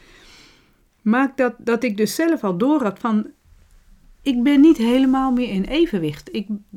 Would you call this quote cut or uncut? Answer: uncut